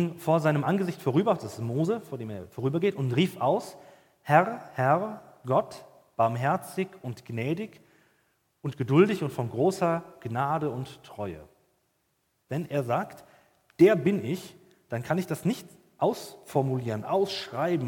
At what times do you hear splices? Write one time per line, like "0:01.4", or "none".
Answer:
0:12.5